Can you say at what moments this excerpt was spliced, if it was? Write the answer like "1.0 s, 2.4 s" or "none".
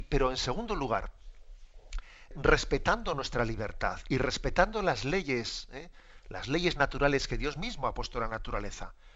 2.3 s